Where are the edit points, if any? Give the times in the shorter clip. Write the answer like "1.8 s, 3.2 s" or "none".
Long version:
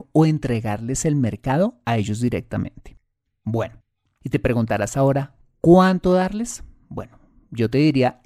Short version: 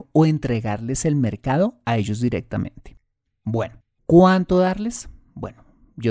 4.0 s